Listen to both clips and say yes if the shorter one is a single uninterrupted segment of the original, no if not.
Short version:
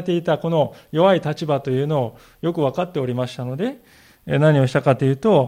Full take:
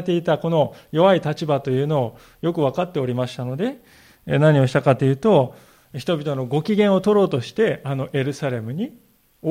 yes